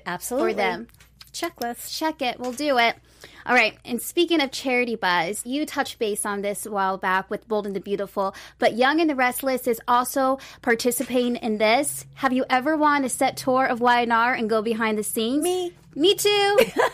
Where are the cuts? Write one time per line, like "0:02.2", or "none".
0:05.4